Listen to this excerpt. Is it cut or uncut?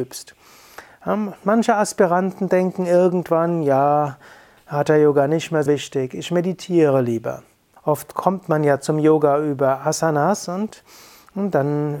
cut